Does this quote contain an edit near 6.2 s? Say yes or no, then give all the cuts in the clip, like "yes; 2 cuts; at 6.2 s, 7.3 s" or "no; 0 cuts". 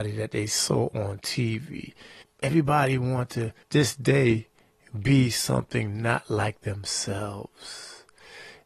no; 2 cuts; at 2.2 s, 3.6 s